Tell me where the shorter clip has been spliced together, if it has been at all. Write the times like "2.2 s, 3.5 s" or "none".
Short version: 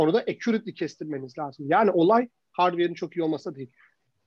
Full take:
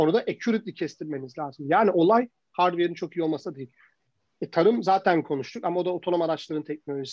none